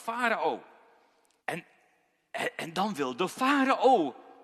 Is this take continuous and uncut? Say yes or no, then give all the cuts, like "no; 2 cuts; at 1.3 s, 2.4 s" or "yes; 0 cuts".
no; 1 cut; at 1.4 s